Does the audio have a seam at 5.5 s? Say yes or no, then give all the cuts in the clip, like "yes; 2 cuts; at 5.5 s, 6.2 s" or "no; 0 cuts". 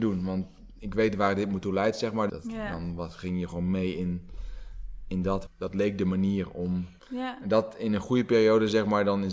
yes; 3 cuts; at 2.3 s, 5.5 s, 7.0 s